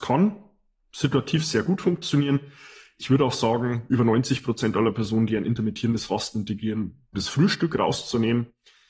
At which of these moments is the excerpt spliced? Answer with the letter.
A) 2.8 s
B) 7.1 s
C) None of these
B